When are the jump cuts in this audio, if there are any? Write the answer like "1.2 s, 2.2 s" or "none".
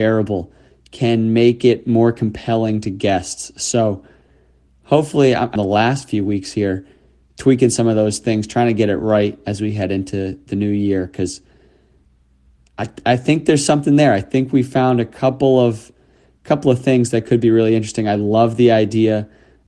5.6 s